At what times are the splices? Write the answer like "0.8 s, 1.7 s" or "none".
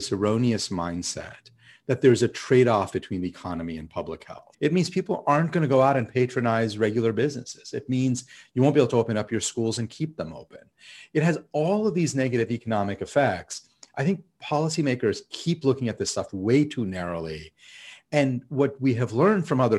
4.5 s